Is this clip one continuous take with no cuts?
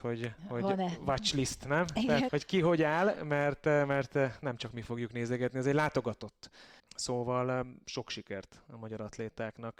no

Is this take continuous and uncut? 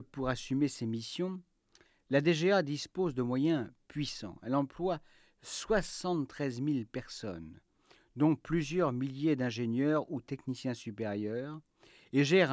yes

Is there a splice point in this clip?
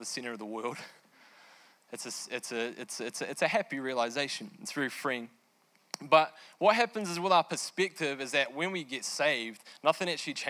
no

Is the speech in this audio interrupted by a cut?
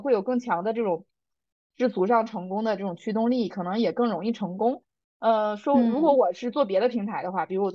no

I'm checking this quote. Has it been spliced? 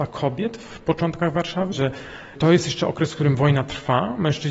yes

